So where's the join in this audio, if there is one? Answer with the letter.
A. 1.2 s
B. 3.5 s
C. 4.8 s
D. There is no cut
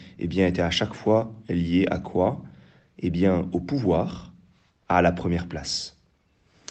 C